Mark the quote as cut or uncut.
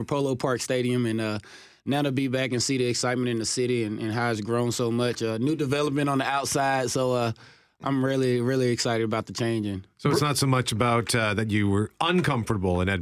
uncut